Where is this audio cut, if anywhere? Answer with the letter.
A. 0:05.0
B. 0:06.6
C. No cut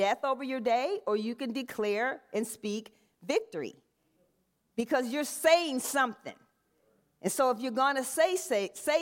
C